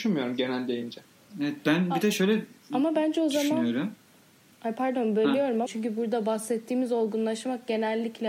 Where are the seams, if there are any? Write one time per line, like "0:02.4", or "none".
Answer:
0:05.7